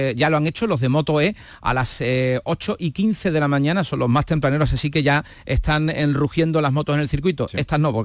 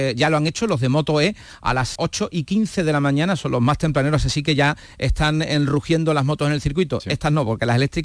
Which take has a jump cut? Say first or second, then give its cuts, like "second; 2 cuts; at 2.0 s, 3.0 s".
second; 1 cut; at 2.0 s